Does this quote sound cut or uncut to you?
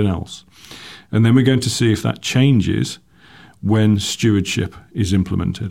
uncut